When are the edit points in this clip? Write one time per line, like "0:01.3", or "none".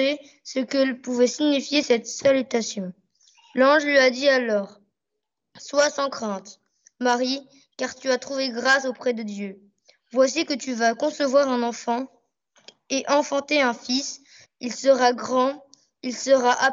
0:14.4